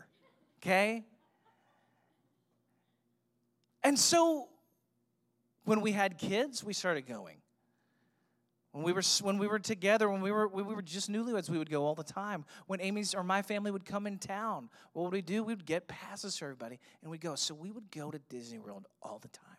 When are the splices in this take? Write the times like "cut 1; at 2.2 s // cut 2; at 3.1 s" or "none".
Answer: none